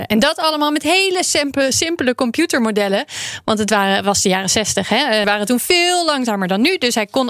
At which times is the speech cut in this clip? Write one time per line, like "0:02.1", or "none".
0:05.2

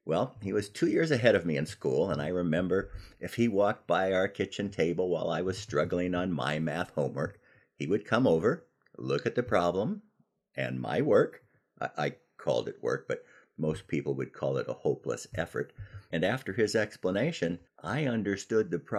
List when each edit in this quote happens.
0:16.1
0:17.7

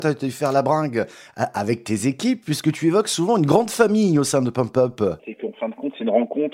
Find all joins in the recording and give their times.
0:05.2

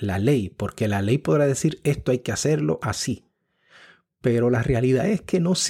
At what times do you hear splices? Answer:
none

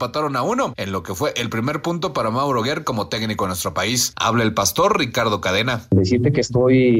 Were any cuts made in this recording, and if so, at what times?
0:04.1

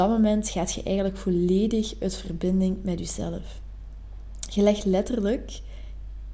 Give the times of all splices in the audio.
none

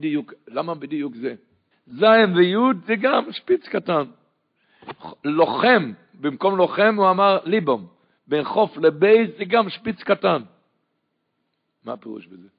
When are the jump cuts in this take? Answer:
0:01.7

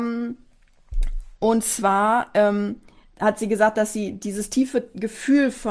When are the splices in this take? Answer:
none

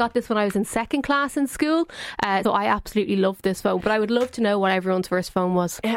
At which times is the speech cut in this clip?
0:02.4

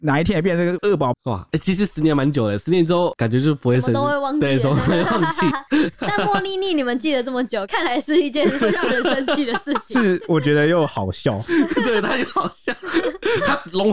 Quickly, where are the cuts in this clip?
0:01.1
0:05.5

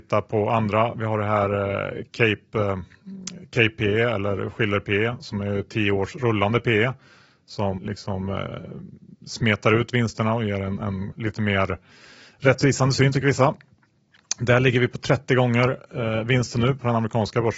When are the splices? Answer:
0:07.8
0:11.1

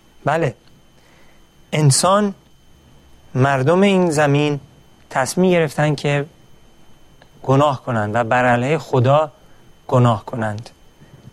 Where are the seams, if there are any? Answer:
none

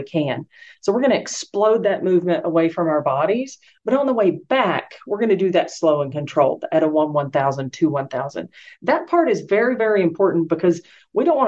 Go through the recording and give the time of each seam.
none

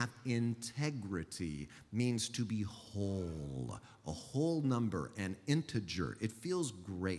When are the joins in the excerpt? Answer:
none

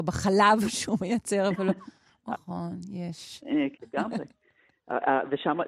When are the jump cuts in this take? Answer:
0:02.3
0:03.7

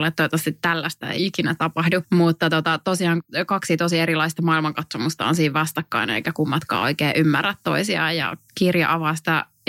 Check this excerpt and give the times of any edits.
none

